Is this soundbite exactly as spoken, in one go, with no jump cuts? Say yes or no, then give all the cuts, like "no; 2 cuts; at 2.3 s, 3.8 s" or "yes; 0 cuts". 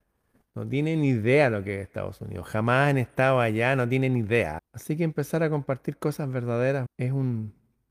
no; 2 cuts; at 4.6 s, 6.9 s